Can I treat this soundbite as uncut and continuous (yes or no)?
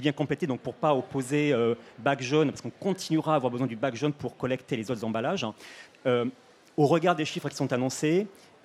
no